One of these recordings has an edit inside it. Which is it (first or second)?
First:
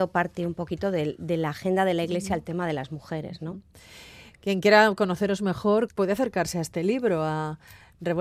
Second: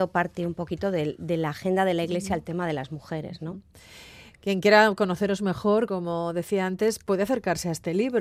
first